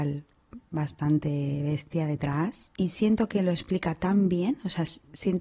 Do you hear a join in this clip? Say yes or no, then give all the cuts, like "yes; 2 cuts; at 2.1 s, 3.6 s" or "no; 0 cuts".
no; 0 cuts